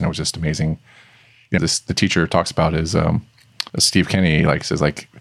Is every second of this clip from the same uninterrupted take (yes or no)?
no